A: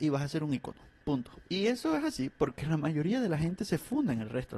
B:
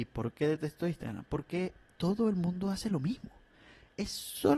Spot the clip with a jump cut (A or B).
A